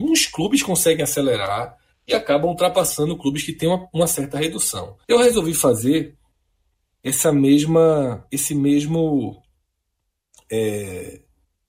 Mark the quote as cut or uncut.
cut